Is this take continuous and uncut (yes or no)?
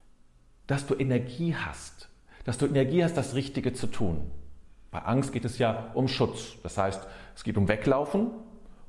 yes